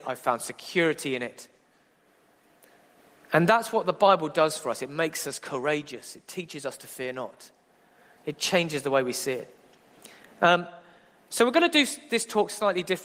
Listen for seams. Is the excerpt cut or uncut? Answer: uncut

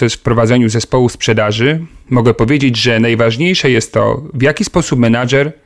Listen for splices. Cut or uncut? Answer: uncut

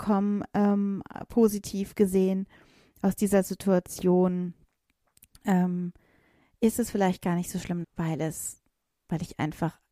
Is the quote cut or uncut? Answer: cut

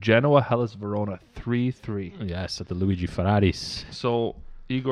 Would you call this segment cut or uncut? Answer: uncut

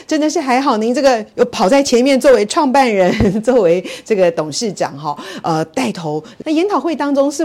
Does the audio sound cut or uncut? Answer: cut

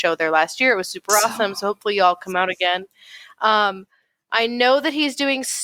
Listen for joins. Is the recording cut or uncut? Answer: uncut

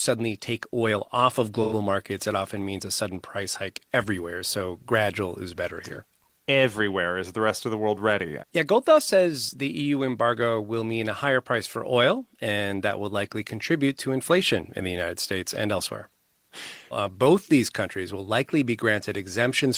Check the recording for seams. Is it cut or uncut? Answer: cut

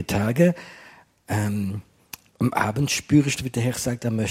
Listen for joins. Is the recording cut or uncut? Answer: cut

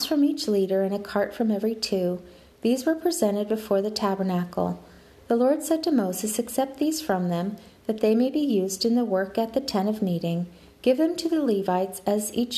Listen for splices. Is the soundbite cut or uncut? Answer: uncut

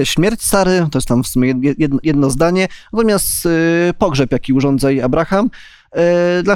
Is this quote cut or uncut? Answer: cut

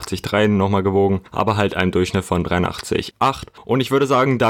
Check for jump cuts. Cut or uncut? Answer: uncut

